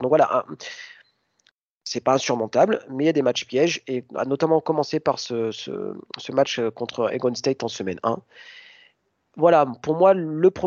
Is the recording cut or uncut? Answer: uncut